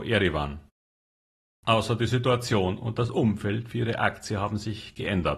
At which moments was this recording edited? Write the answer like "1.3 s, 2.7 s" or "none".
1.6 s